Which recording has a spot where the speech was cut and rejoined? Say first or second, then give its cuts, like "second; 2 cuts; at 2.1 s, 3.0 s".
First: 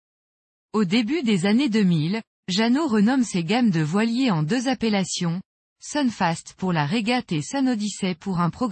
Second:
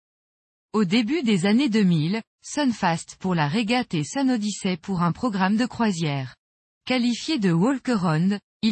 second; 2 cuts; at 2.3 s, 6.7 s